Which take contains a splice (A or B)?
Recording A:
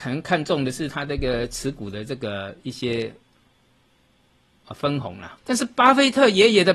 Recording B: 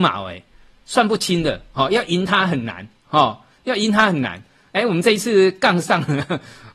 A